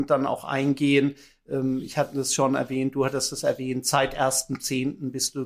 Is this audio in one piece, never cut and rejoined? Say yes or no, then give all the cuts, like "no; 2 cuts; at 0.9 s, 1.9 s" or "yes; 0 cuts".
yes; 0 cuts